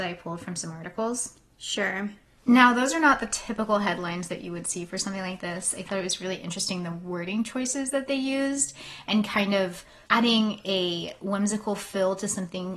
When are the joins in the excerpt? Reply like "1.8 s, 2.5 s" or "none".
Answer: 2.4 s